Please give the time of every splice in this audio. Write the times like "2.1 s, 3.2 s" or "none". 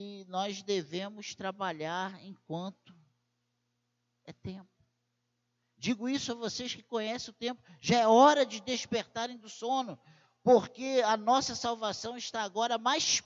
none